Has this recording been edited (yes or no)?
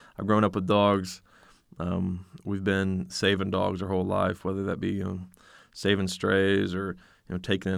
no